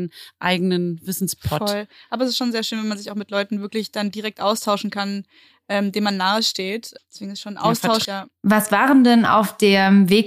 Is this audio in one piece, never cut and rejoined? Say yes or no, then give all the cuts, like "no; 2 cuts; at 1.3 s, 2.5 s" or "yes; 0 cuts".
no; 2 cuts; at 7.0 s, 8.0 s